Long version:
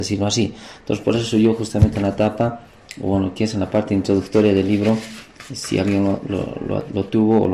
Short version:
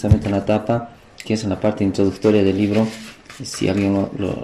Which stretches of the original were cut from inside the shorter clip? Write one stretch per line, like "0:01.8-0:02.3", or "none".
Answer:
0:02.9-0:03.3